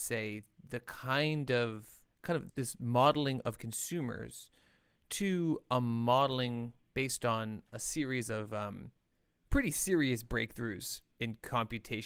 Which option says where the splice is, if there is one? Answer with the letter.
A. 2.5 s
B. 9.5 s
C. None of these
A